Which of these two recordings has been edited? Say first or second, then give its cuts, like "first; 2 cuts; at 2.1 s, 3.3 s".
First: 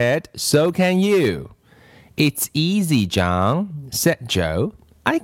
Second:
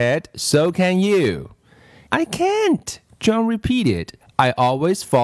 second; 1 cut; at 2.1 s